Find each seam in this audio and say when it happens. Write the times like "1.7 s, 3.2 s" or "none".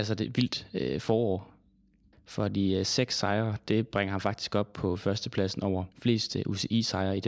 2.1 s, 5.9 s